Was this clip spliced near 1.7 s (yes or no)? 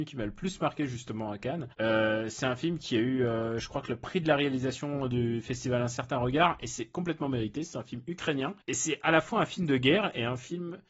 yes